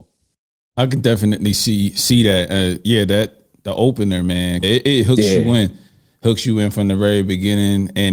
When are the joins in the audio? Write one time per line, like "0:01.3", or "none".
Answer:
0:04.6

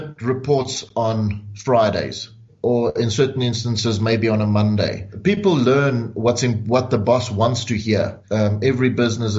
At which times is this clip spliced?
0:08.2

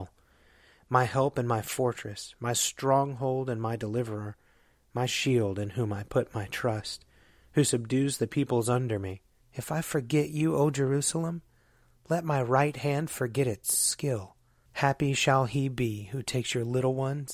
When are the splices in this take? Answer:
0:09.4
0:14.6

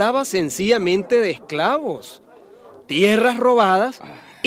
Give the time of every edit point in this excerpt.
none

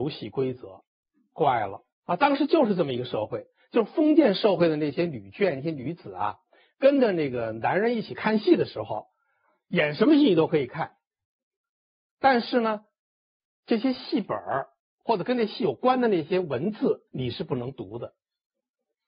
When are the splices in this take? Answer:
0:01.9
0:17.1

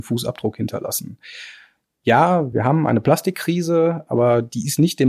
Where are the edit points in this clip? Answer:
none

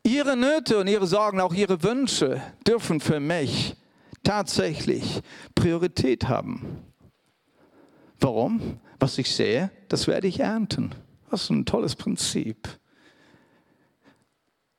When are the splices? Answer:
none

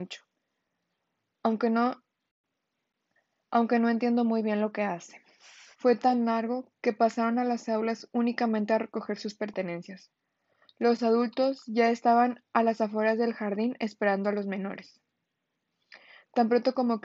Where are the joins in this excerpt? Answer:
0:05.7

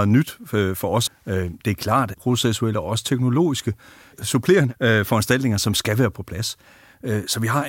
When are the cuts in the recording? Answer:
0:01.1
0:02.1

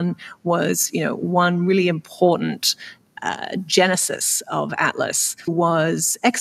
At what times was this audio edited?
0:05.5

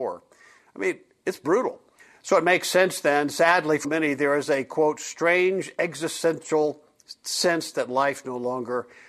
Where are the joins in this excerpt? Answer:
0:03.8

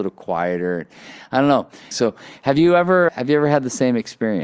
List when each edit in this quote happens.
0:01.9
0:03.1

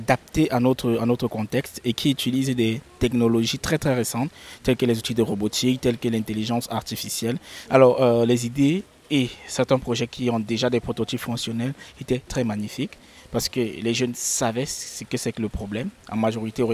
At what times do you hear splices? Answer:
0:07.7
0:12.3

